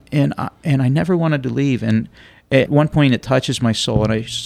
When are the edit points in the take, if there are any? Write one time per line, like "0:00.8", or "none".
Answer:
0:02.7